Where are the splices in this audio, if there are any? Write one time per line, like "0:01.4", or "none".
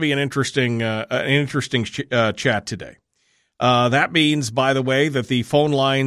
none